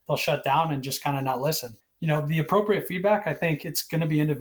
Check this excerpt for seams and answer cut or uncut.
cut